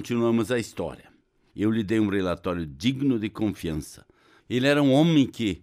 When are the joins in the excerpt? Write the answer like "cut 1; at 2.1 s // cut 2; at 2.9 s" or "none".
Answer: cut 1; at 1.5 s // cut 2; at 4.4 s